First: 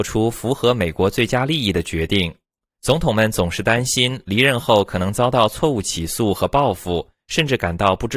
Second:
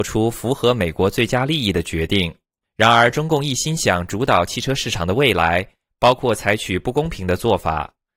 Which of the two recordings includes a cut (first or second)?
second